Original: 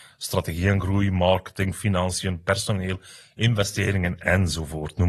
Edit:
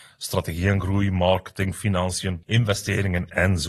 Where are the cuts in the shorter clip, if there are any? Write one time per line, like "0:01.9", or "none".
0:02.4